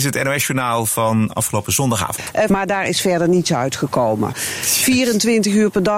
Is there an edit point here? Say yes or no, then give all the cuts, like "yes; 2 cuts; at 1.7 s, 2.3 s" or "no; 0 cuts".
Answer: yes; 2 cuts; at 2.5 s, 4.3 s